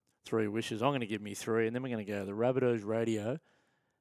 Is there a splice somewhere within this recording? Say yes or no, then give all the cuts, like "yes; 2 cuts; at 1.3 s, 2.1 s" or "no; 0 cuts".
no; 0 cuts